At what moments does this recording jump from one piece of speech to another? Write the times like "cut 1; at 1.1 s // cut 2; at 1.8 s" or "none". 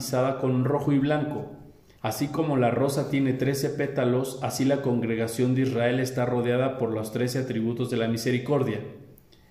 cut 1; at 2.0 s